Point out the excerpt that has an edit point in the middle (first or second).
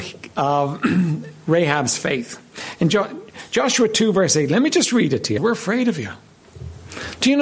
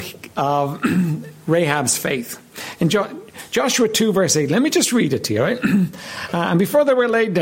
first